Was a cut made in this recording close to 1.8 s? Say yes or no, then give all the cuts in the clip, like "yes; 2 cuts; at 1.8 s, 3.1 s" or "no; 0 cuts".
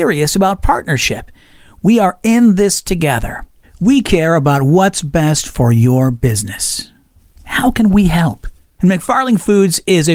no; 1 cut; at 3.6 s